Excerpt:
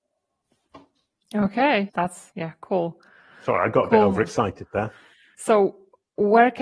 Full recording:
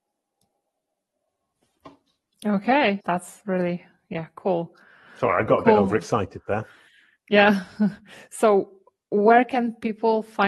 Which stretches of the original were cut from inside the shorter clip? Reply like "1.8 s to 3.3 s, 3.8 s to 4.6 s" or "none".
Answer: 3.4 s to 4.1 s, 7.1 s to 8.3 s